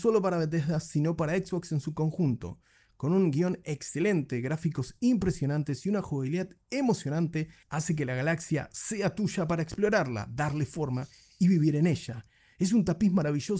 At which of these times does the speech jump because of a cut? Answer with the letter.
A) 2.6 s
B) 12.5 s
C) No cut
C